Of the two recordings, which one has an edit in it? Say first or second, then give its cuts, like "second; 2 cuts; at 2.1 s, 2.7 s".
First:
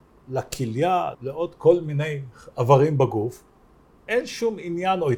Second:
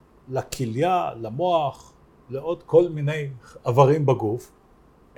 first; 1 cut; at 1.1 s